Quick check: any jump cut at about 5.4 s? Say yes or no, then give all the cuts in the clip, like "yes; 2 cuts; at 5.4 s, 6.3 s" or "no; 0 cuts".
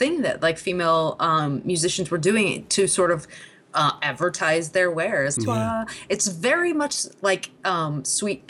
yes; 1 cut; at 5.4 s